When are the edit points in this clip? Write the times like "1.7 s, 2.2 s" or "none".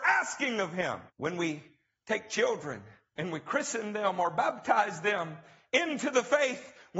1.1 s